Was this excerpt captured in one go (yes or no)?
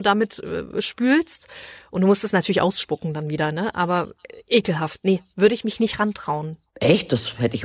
yes